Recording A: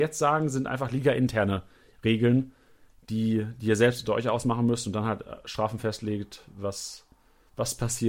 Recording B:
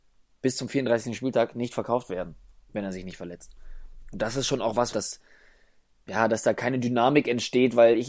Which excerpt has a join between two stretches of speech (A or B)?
B